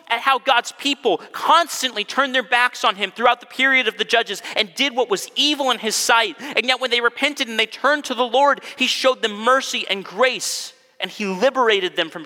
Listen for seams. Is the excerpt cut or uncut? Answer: uncut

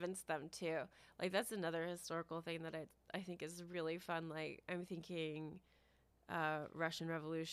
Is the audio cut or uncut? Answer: uncut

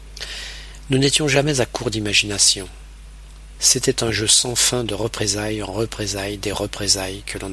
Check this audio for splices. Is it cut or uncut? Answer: cut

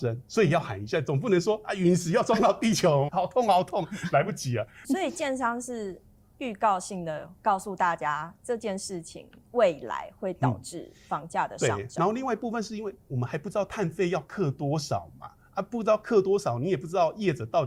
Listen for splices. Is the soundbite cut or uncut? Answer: cut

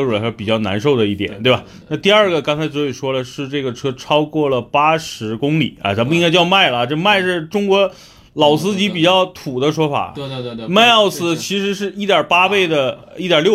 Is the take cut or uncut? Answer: uncut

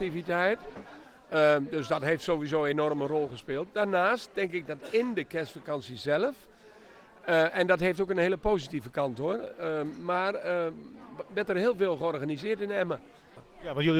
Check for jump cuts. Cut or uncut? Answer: uncut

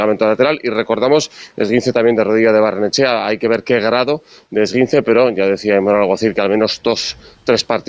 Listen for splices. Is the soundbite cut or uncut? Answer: uncut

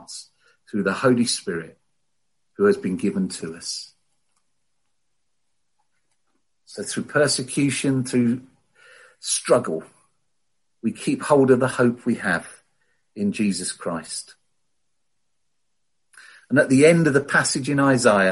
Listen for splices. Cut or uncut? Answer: uncut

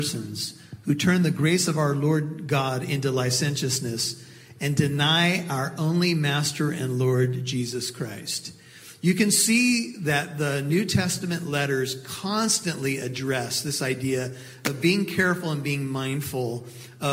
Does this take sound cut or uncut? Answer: uncut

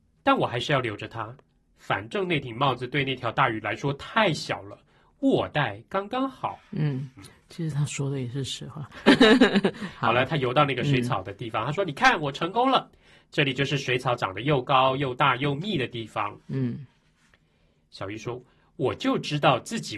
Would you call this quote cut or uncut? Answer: uncut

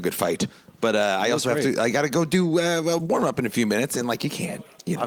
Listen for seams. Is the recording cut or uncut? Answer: uncut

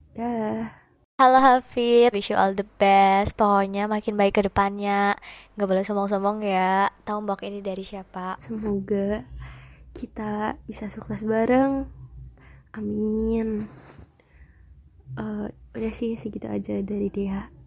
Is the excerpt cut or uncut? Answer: cut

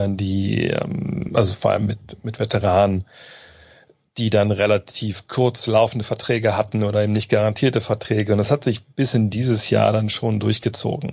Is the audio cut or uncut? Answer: uncut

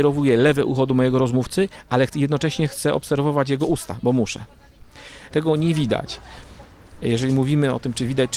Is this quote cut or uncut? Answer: cut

